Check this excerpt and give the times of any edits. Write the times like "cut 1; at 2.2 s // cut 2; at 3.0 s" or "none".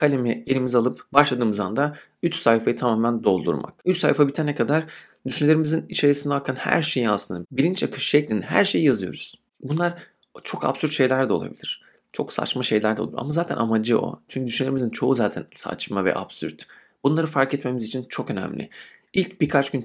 none